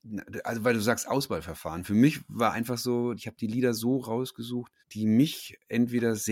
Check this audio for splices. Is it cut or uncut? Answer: cut